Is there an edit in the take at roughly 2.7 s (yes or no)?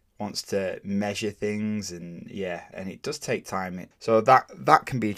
yes